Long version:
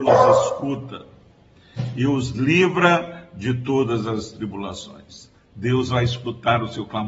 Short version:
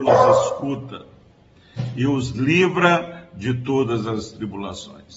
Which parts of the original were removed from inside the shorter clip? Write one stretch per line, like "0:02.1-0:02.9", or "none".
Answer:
none